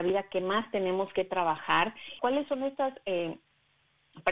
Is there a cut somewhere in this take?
yes; 1 cut; at 2.2 s

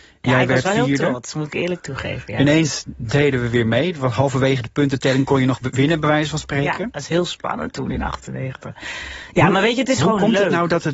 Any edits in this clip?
no; 0 cuts

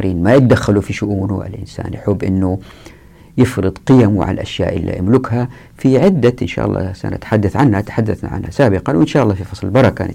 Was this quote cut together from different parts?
no; 0 cuts

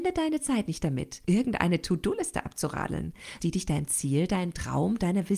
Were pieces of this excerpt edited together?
yes; 2 cuts; at 1.2 s, 3.4 s

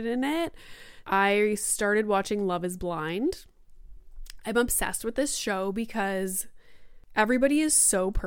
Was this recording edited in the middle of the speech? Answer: yes; 1 cut; at 1.0 s

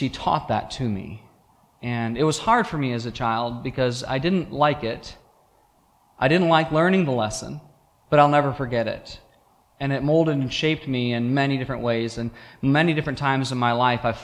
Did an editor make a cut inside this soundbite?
yes; 1 cut; at 8.1 s

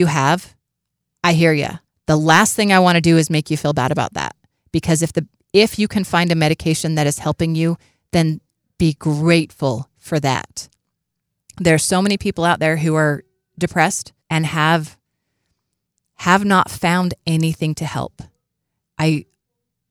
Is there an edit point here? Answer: yes; 3 cuts; at 1.9 s, 14.2 s, 18.8 s

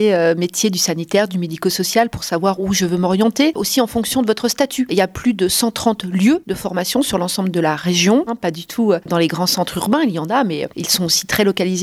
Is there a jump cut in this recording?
yes; 2 cuts; at 4.9 s, 8.3 s

